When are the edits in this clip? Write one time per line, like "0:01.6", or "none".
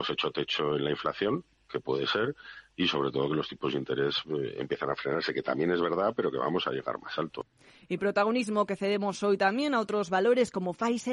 none